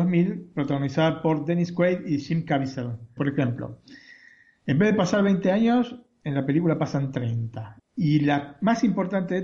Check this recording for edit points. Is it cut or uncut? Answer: cut